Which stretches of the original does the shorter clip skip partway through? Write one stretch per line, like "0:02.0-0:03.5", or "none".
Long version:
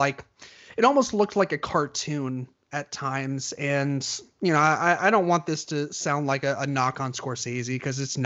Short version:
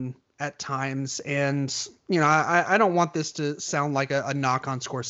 none